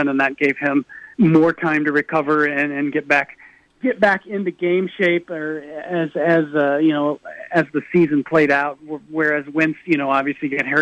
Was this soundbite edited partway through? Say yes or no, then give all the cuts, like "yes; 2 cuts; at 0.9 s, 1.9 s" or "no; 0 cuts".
yes; 1 cut; at 1.1 s